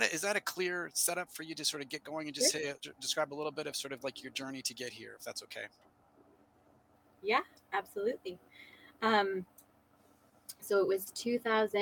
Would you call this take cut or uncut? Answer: uncut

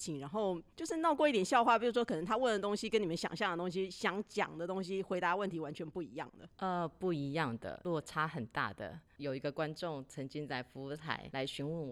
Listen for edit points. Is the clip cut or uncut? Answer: uncut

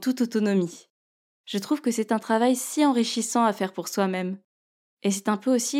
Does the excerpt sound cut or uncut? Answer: cut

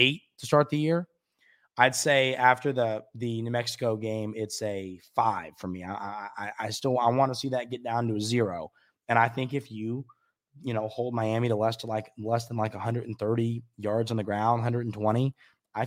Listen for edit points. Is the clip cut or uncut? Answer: uncut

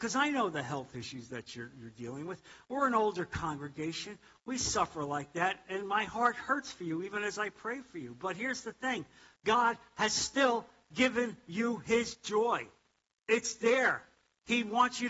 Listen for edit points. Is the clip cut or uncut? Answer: uncut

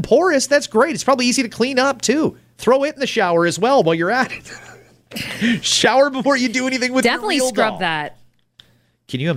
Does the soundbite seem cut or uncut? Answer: uncut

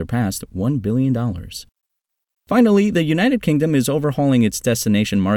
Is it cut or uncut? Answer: uncut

